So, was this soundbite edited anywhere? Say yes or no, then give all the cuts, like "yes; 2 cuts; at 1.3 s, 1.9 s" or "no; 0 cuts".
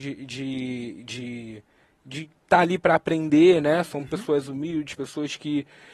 no; 0 cuts